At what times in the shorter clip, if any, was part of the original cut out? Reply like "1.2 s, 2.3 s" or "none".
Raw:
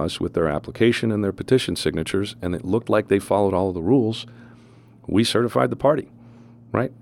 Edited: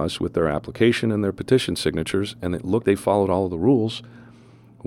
2.8 s